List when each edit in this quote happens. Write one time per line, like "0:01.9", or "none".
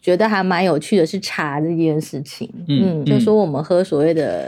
0:03.0